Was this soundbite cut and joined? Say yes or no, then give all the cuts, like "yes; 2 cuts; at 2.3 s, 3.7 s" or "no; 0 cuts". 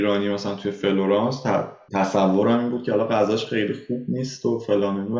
yes; 1 cut; at 1.9 s